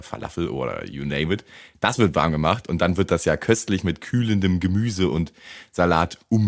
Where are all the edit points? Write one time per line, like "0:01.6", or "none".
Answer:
none